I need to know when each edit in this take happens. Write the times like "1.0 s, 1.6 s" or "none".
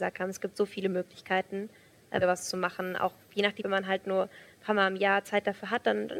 2.2 s, 3.6 s